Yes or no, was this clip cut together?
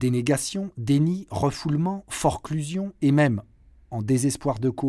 no